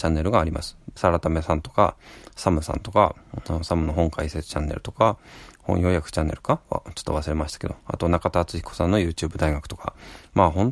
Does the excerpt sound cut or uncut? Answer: cut